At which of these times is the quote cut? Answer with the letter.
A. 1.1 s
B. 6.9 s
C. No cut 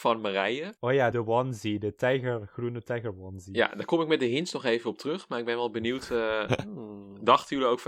A